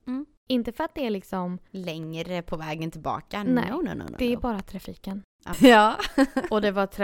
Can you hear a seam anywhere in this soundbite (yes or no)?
yes